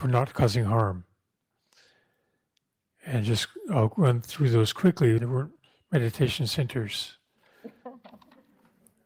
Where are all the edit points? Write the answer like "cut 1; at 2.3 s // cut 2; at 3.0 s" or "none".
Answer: cut 1; at 5.2 s